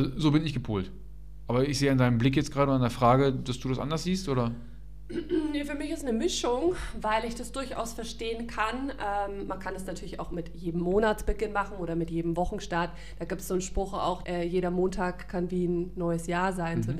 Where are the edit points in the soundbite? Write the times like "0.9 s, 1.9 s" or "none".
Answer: 14.2 s